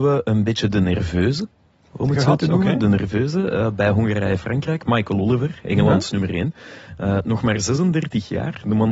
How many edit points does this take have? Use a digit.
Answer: 0